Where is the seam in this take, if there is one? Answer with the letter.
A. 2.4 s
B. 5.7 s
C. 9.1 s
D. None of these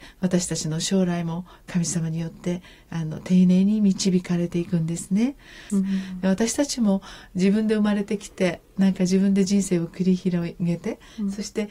B